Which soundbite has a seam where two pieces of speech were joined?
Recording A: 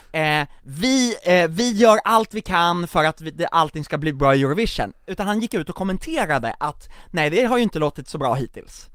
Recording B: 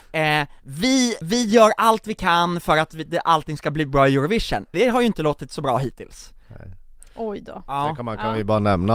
B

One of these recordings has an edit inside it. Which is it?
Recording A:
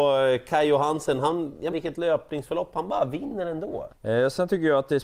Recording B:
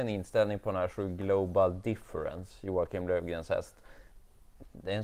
A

